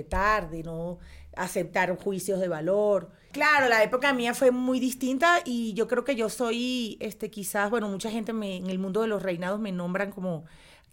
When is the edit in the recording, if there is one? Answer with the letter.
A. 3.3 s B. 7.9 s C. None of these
A